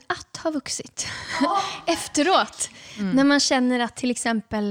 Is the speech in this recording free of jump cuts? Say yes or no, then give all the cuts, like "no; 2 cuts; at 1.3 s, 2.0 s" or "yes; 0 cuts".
yes; 0 cuts